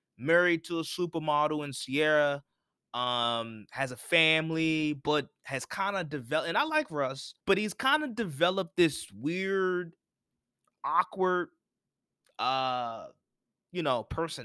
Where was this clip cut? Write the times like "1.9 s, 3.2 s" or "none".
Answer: 7.4 s